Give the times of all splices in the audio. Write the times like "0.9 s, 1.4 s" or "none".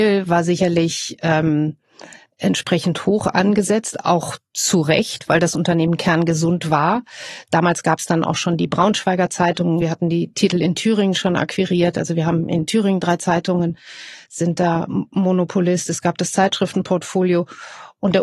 none